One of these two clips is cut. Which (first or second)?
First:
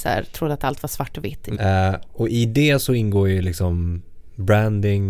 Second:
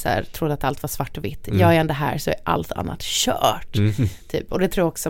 first